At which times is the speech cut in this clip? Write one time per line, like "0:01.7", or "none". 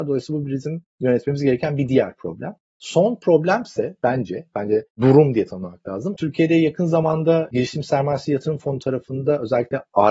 0:04.5
0:06.1